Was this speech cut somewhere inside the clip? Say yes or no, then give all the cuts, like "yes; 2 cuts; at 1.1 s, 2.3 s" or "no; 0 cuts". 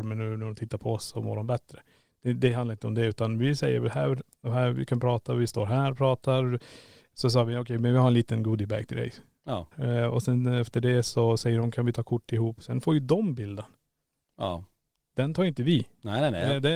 yes; 1 cut; at 9.7 s